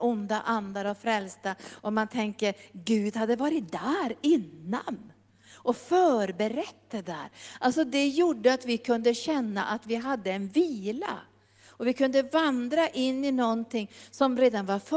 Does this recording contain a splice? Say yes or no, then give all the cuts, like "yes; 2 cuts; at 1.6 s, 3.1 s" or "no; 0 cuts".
no; 0 cuts